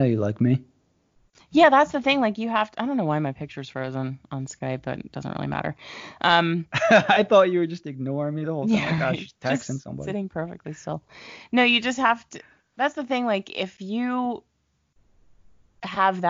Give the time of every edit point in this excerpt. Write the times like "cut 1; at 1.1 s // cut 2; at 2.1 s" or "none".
none